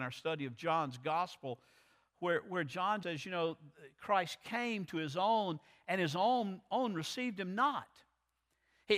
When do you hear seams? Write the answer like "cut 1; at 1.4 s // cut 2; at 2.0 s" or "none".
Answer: cut 1; at 3.0 s